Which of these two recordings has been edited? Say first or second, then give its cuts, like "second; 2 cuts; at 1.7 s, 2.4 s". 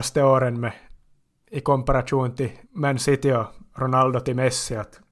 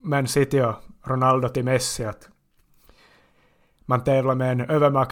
first; 2 cuts; at 1.4 s, 2.6 s